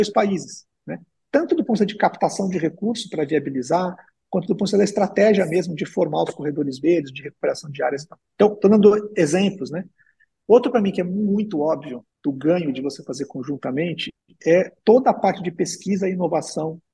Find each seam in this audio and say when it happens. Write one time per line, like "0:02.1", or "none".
0:12.1